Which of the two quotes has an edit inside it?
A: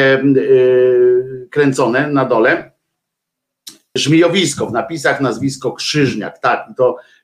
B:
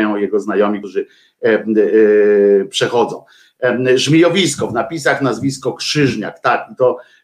A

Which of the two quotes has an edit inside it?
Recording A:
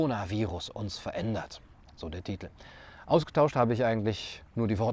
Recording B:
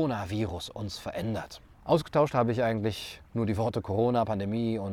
B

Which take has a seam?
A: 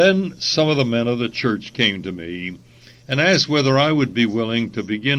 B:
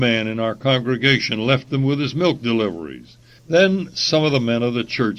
B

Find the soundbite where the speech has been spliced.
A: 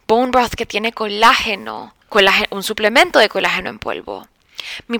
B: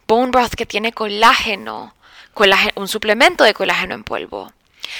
A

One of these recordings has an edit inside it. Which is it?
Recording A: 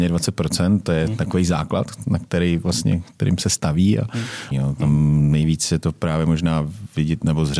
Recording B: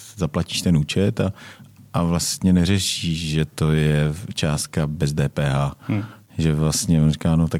A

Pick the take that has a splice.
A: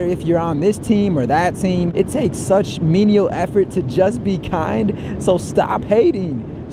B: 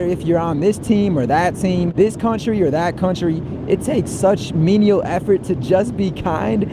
A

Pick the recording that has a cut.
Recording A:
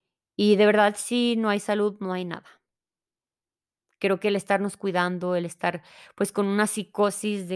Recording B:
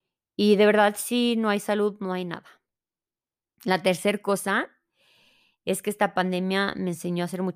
B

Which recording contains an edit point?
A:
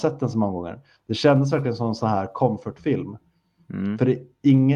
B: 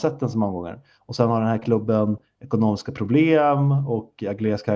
B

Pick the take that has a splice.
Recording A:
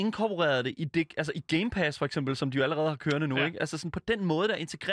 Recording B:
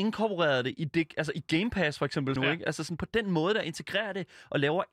B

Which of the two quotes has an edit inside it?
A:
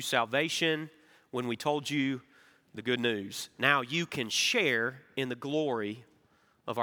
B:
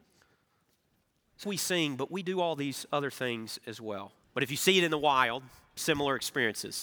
B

